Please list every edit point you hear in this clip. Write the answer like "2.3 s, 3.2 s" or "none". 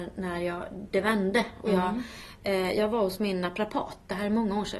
none